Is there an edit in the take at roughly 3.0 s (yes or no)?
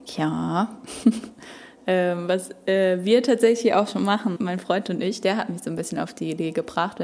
no